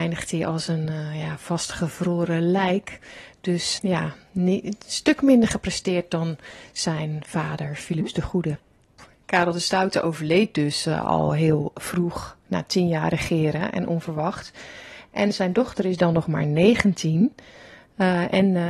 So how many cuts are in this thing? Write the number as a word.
one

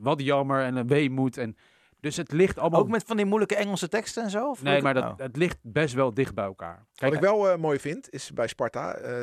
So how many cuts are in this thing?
one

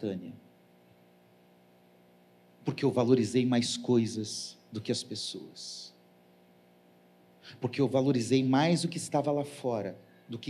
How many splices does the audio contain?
zero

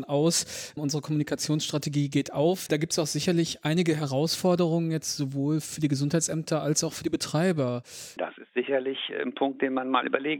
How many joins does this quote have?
two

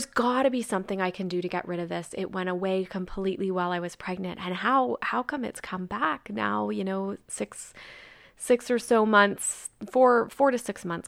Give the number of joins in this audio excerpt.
zero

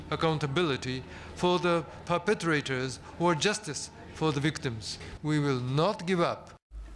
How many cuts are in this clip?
one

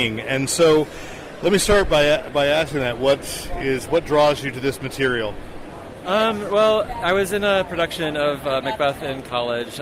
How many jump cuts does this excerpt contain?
zero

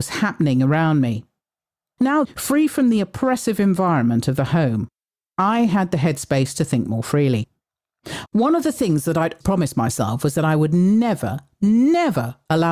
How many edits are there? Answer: three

